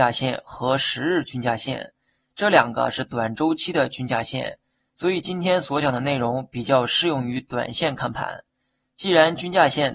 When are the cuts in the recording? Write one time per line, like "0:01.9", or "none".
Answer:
none